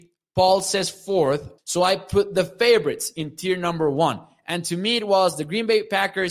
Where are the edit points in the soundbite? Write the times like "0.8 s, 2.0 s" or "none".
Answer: 1.6 s